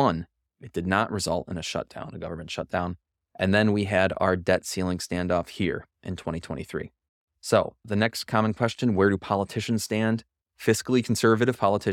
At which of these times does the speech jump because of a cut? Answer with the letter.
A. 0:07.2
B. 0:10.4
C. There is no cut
B